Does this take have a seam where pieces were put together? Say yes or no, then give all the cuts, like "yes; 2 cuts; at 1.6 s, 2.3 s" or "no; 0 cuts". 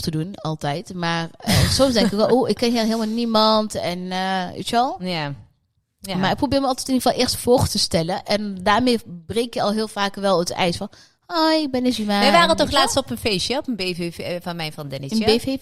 no; 0 cuts